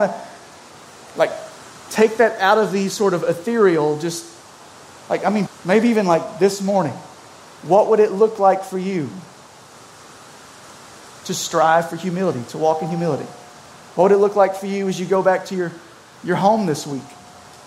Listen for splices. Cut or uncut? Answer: cut